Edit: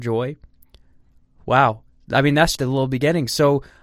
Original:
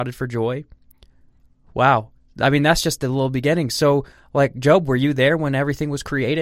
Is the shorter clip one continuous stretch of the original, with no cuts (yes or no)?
no